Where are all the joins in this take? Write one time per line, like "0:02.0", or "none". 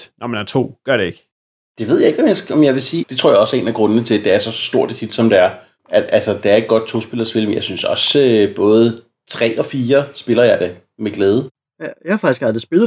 0:03.0

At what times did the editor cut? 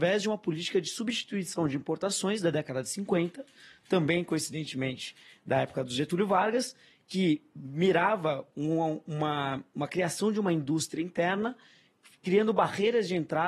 none

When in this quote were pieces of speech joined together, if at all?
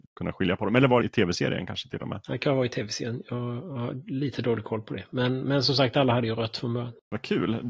0:01.0

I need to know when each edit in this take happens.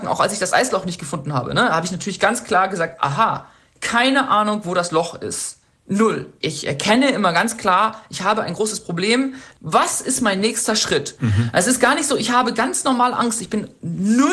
0:06.4
0:11.2

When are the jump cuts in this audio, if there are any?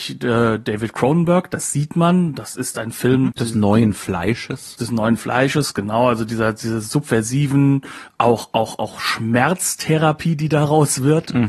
0:03.3

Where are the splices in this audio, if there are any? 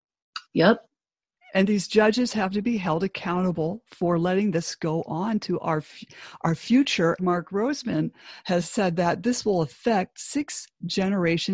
0:07.2

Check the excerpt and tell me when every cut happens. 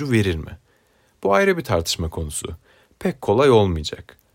none

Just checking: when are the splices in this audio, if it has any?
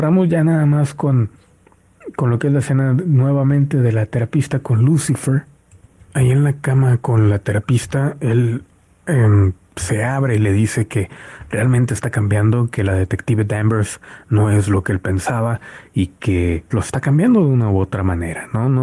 0:09.7
0:16.7

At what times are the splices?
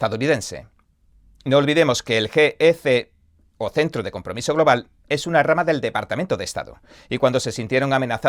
none

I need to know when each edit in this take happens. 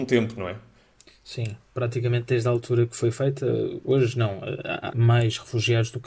0:03.8
0:04.9

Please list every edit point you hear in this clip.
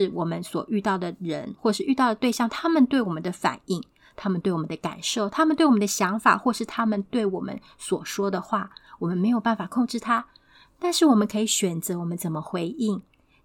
none

